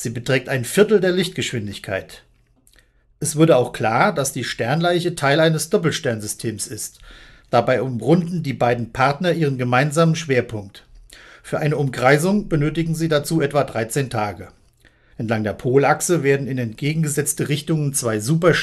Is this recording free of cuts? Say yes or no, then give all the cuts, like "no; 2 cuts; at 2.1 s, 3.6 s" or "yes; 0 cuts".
no; 1 cut; at 15.1 s